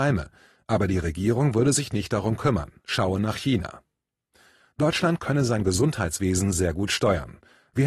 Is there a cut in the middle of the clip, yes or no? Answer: no